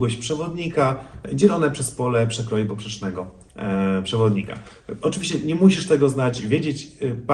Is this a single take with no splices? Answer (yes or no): yes